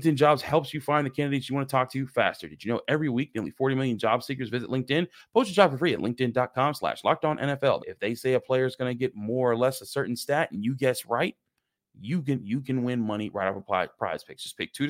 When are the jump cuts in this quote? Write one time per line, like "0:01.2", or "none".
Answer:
0:07.8